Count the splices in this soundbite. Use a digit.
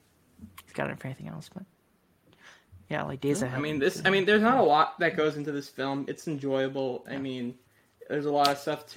0